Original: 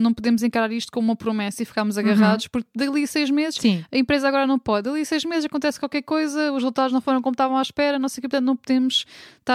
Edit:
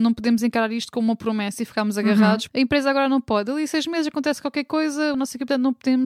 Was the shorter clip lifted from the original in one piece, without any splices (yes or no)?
no